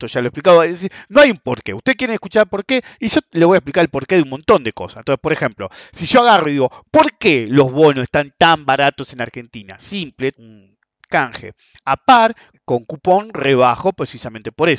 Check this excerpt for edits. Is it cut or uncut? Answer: cut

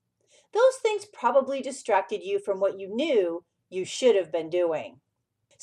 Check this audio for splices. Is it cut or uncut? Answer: uncut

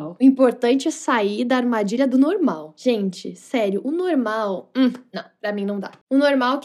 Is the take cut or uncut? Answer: uncut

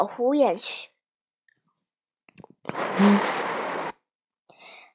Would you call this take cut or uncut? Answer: uncut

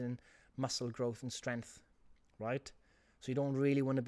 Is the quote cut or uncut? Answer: uncut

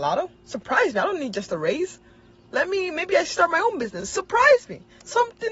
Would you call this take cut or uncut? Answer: uncut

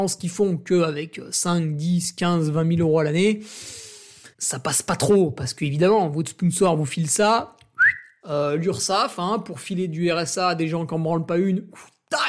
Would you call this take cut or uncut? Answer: cut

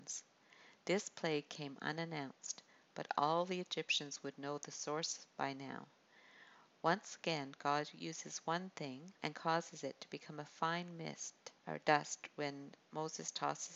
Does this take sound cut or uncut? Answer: cut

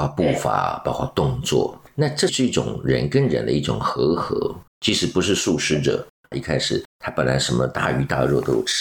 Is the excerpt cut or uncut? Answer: cut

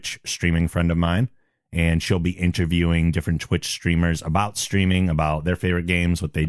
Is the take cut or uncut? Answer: uncut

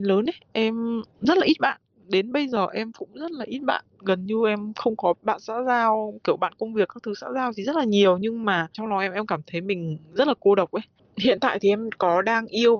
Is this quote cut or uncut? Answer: cut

